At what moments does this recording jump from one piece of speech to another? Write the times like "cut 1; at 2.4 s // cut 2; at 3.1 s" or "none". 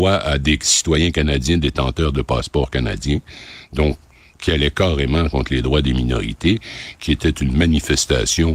none